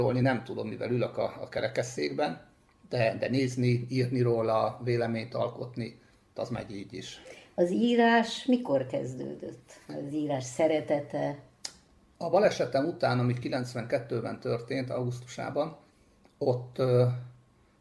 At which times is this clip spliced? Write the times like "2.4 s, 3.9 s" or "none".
none